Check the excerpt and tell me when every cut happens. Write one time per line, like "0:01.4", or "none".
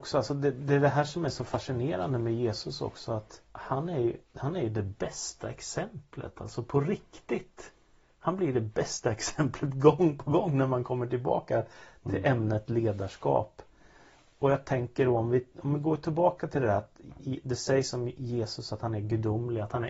0:03.4